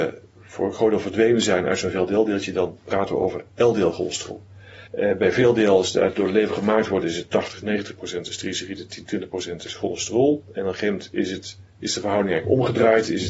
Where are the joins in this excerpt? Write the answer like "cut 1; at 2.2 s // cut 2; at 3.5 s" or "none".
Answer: cut 1; at 4.9 s